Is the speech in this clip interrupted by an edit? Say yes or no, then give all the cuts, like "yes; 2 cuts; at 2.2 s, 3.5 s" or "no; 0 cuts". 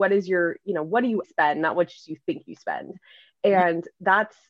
yes; 1 cut; at 1.2 s